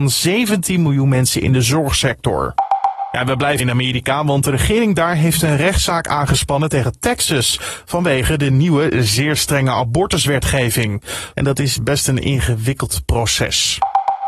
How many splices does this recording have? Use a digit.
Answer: 2